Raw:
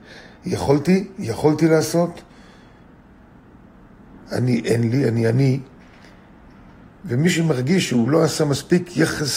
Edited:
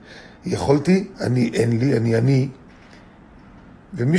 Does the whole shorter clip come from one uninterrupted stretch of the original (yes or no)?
no